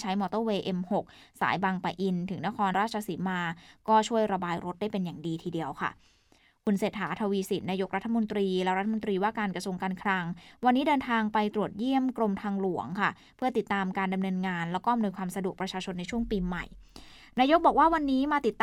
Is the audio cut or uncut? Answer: cut